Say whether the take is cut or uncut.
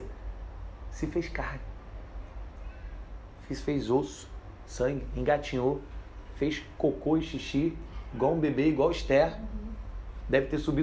uncut